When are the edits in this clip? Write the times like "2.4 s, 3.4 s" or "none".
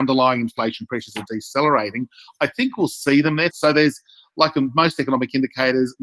3.5 s